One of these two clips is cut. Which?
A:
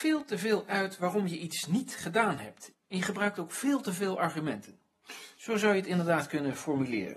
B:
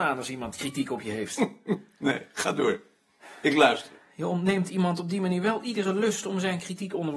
A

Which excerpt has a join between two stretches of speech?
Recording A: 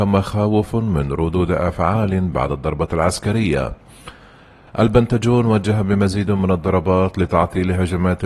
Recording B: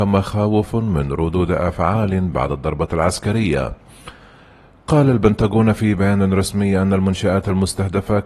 A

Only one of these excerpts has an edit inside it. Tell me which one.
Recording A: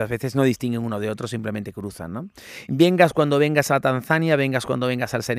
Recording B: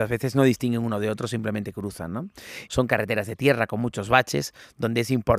B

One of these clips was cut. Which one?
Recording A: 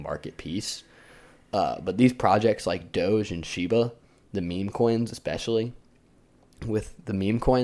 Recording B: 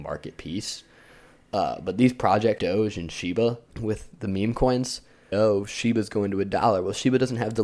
B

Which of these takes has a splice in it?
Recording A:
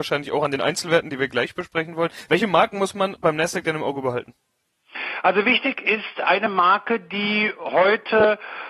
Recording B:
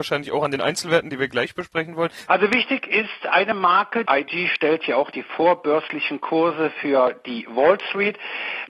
B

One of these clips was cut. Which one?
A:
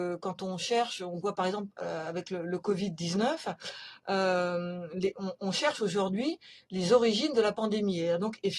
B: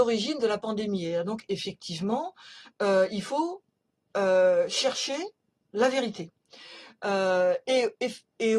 B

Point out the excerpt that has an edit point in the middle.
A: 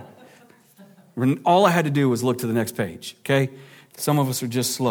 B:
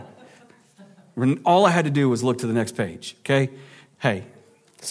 A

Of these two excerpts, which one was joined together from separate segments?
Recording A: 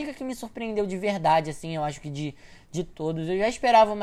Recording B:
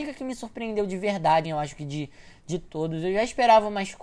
B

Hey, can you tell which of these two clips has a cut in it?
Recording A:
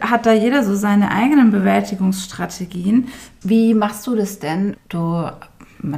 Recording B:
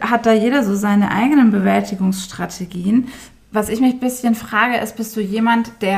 A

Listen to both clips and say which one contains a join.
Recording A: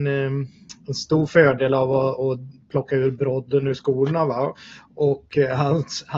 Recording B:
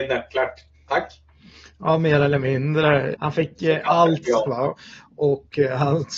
B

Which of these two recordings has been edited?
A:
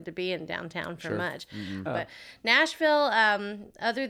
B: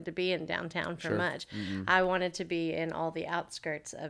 A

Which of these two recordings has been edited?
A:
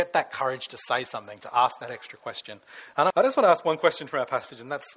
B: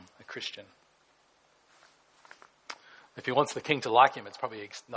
A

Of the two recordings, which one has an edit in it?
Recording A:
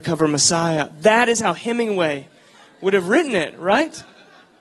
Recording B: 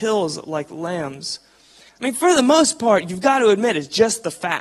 B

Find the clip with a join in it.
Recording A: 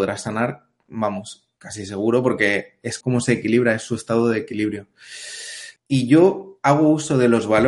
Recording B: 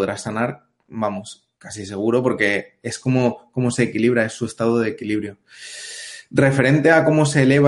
A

